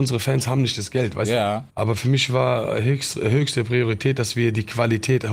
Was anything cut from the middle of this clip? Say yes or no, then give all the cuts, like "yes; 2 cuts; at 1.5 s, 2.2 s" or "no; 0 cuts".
yes; 1 cut; at 1.7 s